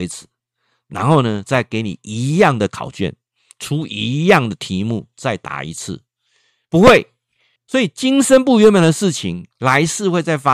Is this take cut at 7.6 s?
yes; 1 cut; at 7.6 s

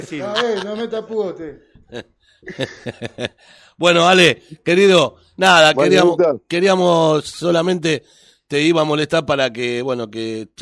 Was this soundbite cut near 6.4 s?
no; 0 cuts

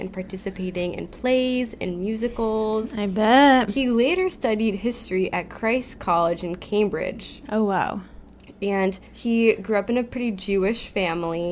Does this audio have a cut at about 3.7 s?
no; 2 cuts; at 7.4 s, 9.1 s

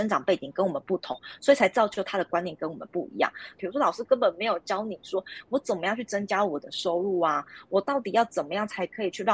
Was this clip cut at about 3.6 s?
yes; 1 cut; at 3.6 s

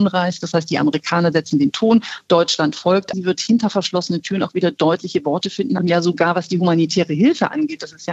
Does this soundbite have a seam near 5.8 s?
yes; 2 cuts; at 3.1 s, 5.8 s

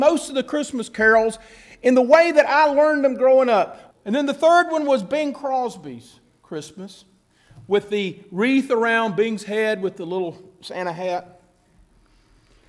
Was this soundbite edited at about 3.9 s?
yes; 1 cut; at 3.9 s

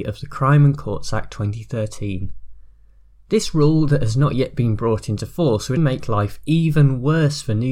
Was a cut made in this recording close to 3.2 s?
no; 1 cut; at 5.8 s

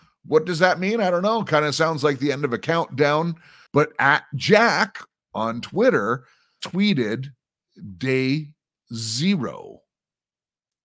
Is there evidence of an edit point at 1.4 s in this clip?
no; 2 cuts; at 3.7 s, 6.6 s

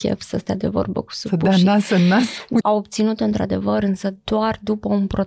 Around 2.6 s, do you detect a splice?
yes; 1 cut; at 2.6 s

